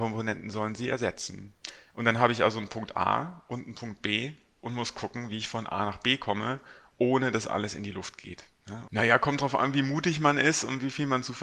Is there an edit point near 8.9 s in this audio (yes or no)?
yes